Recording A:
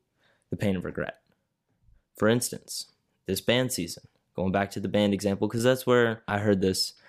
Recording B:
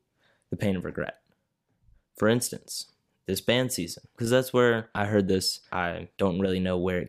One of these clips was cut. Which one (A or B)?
B